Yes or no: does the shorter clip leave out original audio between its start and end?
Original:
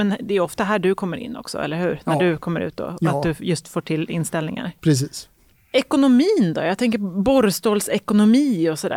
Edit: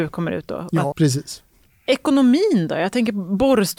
yes